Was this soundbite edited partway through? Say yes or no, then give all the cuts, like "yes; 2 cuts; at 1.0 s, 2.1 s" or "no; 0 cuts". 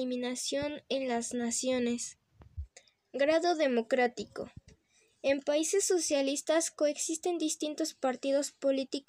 no; 0 cuts